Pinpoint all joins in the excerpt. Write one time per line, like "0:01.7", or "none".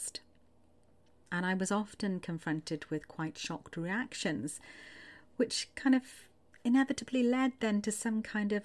none